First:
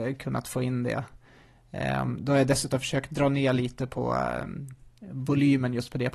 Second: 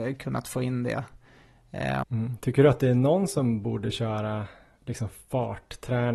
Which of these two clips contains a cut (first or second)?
second